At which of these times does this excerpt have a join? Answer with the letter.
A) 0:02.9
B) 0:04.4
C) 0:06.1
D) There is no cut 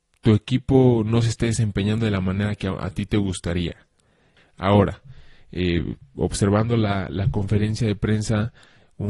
B